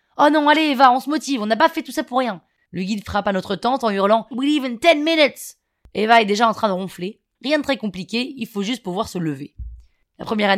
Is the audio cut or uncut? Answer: cut